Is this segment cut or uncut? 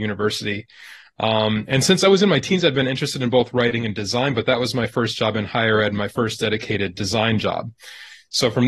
uncut